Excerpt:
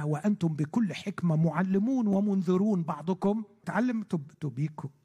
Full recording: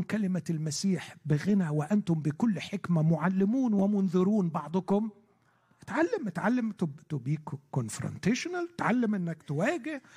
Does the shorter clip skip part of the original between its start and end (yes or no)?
yes